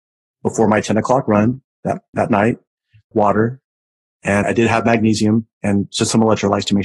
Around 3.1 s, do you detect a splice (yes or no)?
yes